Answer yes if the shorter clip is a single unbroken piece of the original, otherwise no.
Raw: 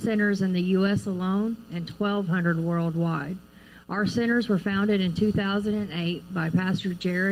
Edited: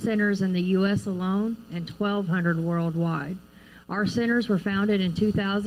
yes